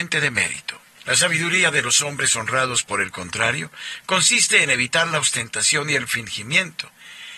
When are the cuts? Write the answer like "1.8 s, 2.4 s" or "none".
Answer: 1.0 s